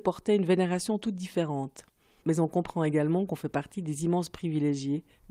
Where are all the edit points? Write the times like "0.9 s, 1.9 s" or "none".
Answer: 2.2 s